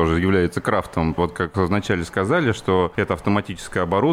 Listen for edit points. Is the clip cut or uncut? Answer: cut